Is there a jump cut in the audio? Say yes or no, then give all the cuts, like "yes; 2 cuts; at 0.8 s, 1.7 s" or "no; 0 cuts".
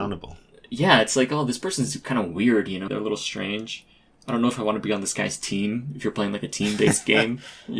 yes; 1 cut; at 2.9 s